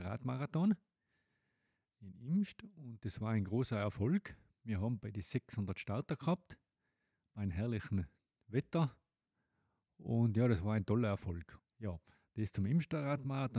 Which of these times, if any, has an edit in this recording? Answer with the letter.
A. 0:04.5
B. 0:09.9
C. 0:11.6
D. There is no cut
C